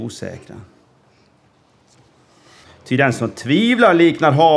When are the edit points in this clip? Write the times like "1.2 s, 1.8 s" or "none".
2.6 s